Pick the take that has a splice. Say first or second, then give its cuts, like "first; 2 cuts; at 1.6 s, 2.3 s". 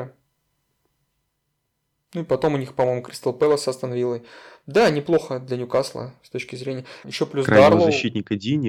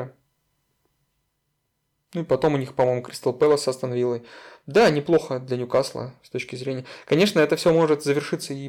first; 1 cut; at 7.0 s